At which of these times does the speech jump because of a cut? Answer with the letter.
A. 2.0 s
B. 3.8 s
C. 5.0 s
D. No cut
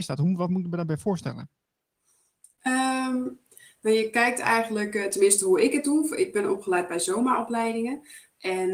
D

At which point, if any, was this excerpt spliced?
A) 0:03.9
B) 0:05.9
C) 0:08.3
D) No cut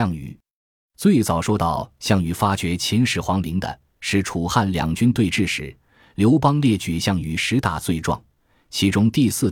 D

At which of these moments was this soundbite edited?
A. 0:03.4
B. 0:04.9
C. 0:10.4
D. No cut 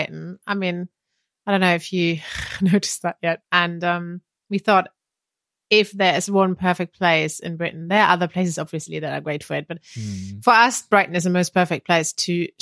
A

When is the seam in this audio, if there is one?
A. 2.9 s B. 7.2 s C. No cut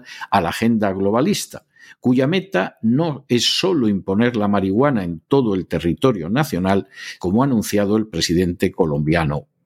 B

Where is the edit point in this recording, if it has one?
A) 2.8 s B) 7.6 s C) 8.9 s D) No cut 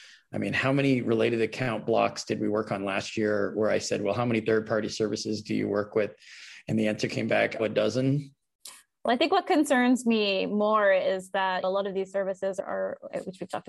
B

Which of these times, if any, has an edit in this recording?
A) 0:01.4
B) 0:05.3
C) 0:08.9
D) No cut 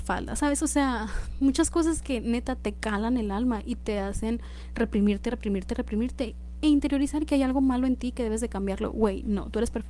D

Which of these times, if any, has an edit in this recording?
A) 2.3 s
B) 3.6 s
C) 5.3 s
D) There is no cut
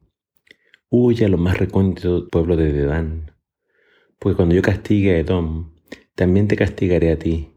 A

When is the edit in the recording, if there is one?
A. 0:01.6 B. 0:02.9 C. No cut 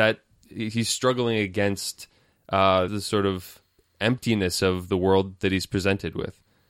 B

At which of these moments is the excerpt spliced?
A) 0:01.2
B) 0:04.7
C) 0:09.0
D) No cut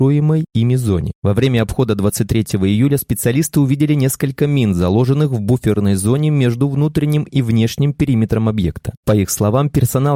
A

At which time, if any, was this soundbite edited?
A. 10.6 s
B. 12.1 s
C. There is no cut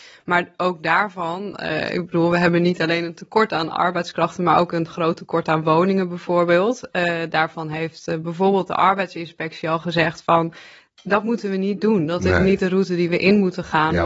C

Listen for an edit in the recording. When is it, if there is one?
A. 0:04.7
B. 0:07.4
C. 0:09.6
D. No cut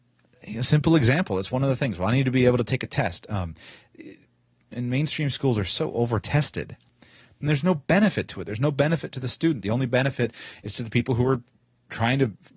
A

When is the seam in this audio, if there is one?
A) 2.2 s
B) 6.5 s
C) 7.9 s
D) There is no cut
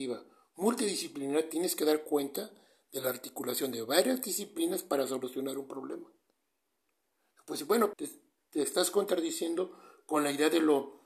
C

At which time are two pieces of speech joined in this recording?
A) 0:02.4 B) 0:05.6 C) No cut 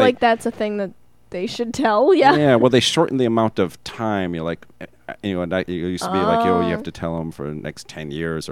B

